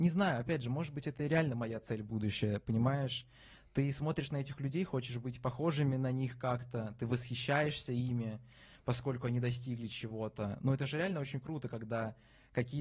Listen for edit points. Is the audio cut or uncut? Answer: uncut